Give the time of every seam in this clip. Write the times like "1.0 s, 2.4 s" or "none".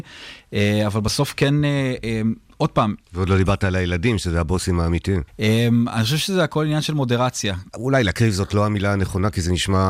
5.3 s, 7.7 s